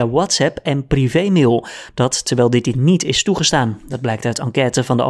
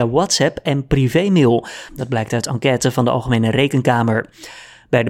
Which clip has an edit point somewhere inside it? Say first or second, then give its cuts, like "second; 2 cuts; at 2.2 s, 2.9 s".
second; 1 cut; at 1.9 s